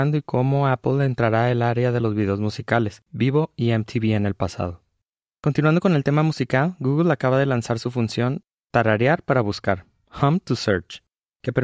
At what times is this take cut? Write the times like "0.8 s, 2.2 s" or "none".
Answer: 3.1 s